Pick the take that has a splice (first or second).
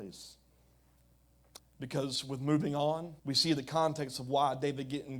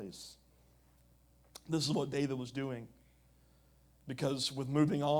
first